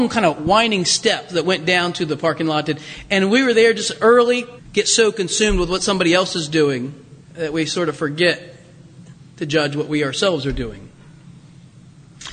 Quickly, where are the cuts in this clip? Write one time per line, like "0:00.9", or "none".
0:04.6
0:07.2